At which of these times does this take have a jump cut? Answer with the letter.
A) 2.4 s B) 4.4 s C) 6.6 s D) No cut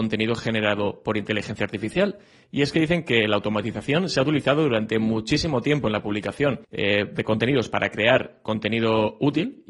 C